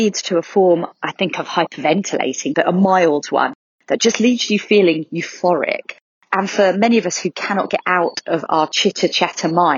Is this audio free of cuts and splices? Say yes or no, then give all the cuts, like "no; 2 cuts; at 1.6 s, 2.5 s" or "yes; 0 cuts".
no; 1 cut; at 2.5 s